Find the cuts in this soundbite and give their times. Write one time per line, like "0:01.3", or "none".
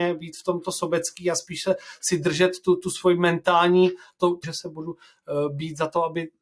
0:04.4